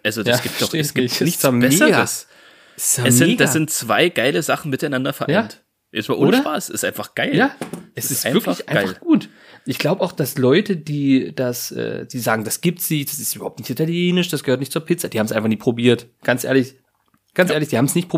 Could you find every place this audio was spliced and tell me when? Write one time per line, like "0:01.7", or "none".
none